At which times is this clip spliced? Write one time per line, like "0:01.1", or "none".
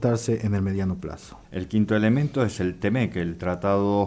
0:01.4